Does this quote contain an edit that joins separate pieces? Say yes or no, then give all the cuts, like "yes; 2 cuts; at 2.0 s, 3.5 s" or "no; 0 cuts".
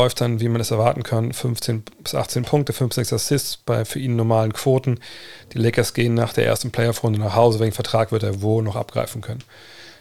no; 0 cuts